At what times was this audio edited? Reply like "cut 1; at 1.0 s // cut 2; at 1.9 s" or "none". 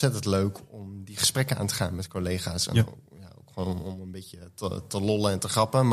none